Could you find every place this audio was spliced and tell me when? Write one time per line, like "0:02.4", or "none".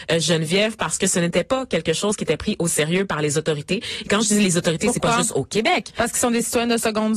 none